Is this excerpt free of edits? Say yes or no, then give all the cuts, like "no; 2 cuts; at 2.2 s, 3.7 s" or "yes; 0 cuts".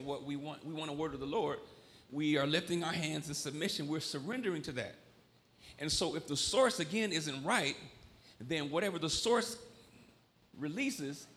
yes; 0 cuts